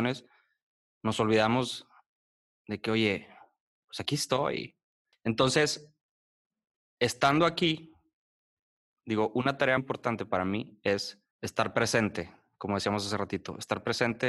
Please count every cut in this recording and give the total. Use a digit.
3